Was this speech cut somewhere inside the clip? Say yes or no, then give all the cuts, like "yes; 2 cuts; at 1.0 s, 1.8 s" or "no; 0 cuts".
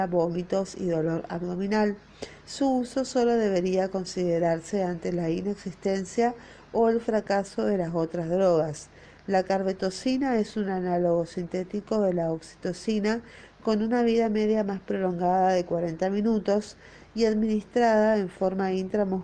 no; 0 cuts